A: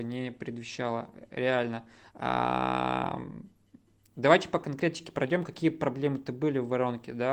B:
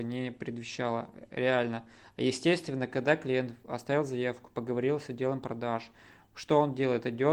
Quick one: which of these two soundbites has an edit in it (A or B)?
A